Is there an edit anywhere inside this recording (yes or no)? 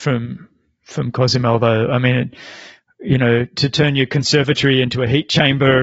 no